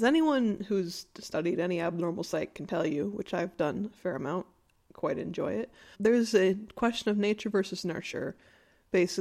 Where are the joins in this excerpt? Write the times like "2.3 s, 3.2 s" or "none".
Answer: 5.9 s